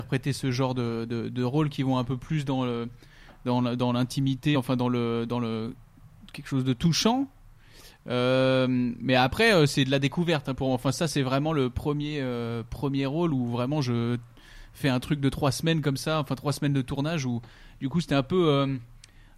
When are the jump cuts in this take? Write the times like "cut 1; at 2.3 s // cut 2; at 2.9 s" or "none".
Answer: none